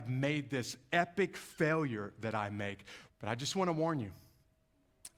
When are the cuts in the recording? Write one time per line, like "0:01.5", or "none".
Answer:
0:03.1